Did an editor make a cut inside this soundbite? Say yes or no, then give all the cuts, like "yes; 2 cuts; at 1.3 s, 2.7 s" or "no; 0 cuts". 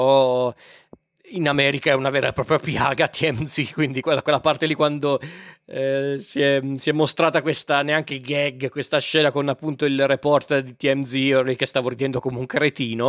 no; 0 cuts